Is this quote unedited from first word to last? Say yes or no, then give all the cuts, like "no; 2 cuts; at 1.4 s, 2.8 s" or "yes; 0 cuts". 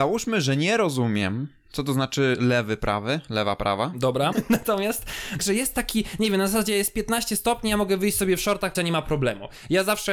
no; 3 cuts; at 4.3 s, 5.4 s, 8.7 s